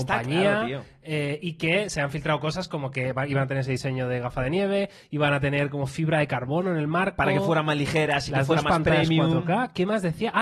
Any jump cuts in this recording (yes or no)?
no